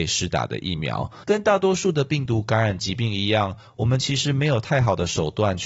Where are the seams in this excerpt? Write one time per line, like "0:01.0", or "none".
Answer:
0:01.2

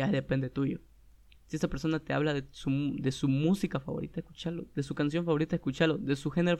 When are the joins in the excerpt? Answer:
0:01.3

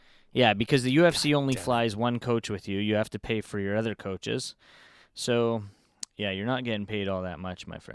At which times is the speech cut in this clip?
none

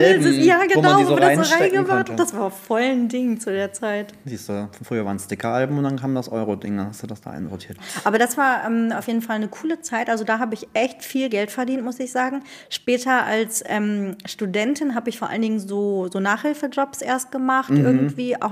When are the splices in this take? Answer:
0:07.8

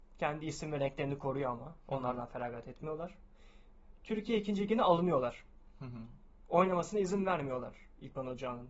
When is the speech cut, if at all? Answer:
0:06.4

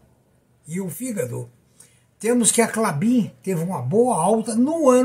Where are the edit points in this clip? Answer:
none

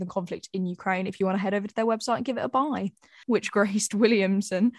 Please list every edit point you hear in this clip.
0:03.2

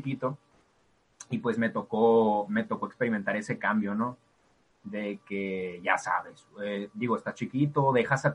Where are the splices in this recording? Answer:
none

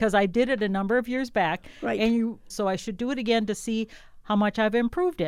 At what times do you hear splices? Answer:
0:02.5

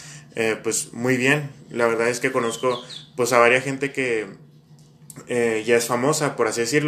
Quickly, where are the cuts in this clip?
none

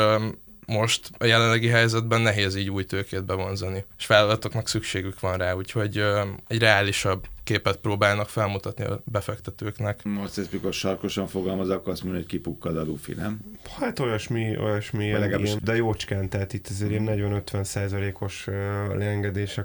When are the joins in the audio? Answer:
0:15.6

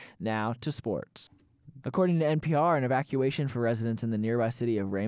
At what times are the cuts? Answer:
0:01.8

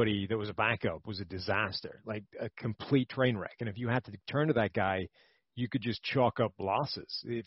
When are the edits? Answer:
none

